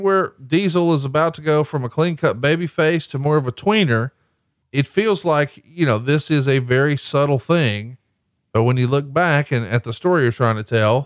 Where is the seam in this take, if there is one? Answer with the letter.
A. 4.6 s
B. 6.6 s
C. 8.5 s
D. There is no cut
A